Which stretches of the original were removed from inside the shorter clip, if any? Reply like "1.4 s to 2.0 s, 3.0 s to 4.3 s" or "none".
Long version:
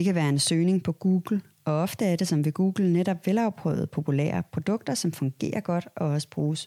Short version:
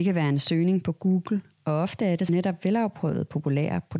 2.3 s to 2.9 s

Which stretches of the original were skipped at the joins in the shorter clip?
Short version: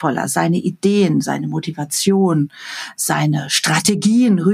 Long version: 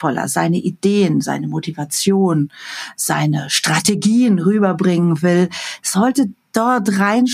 none

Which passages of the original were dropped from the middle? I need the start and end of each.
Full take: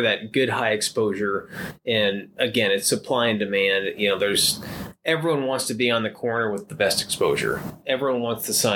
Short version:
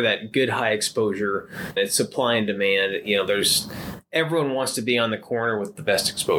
1.8 s to 2.7 s

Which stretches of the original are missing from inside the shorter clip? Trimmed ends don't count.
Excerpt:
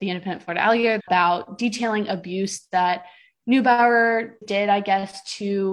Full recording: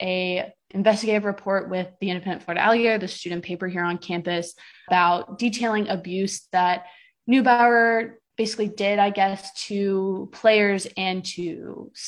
3.0 s to 4.8 s, 8.2 s to 8.7 s

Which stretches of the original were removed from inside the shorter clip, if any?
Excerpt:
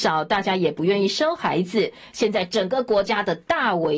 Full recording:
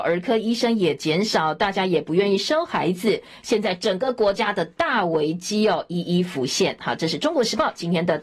none

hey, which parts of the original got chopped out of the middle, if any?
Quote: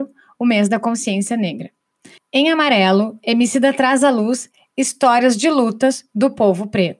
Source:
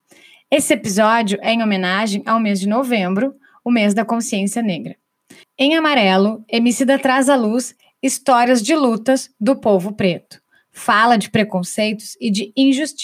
none

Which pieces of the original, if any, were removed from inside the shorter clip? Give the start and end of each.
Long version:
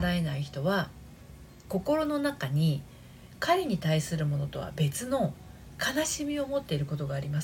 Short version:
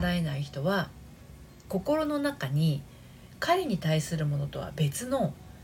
none

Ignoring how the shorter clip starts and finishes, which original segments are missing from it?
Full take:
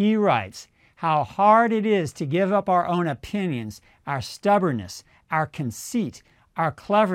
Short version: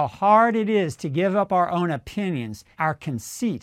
3.9 s to 5.2 s

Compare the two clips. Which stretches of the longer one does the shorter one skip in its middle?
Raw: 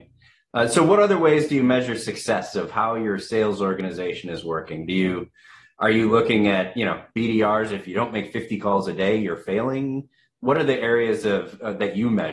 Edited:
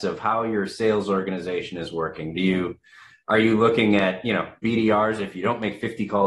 none

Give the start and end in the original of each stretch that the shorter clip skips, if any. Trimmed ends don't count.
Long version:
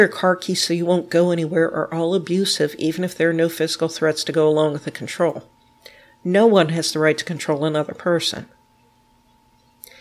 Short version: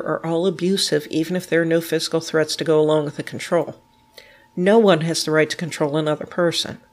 none

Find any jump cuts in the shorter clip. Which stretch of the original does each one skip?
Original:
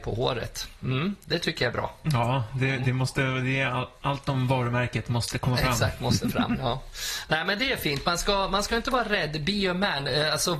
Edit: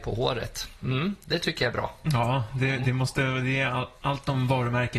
none

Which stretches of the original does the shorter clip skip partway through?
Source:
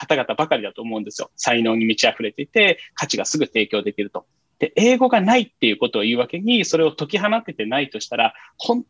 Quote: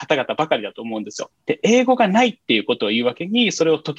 1.3 s to 4.5 s

